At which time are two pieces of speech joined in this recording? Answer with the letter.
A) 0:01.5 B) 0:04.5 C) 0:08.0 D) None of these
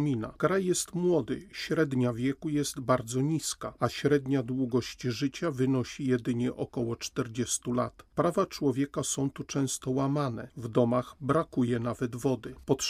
D